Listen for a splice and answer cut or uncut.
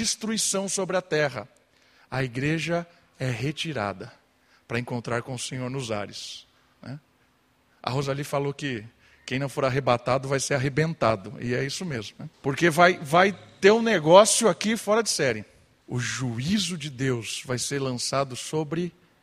cut